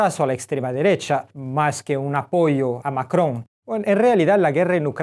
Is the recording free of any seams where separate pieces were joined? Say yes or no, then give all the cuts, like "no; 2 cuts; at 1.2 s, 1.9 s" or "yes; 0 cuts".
no; 1 cut; at 3.5 s